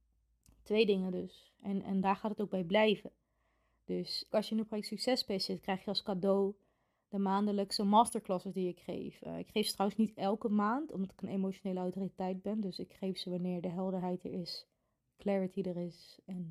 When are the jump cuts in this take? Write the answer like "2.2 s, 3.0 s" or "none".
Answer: 4.3 s

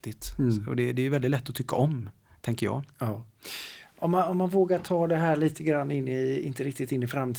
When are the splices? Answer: none

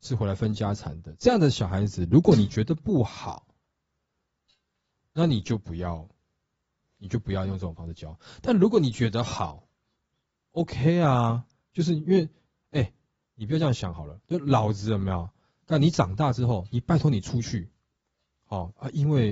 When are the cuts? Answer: none

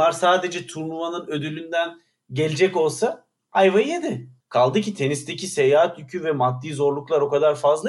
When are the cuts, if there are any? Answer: 4.4 s

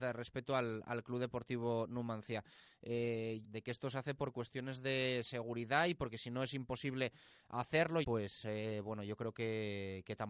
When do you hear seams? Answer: 3.4 s, 8.0 s

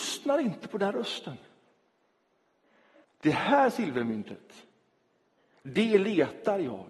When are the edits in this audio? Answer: 3.0 s

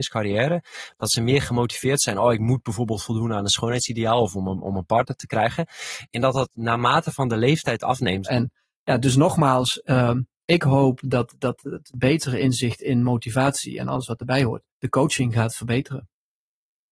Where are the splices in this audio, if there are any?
8.2 s, 14.7 s

